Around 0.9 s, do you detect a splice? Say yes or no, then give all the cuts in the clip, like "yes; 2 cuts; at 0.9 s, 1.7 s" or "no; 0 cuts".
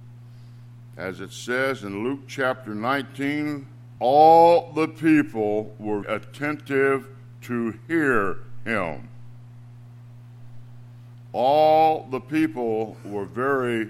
no; 2 cuts; at 4.0 s, 6.0 s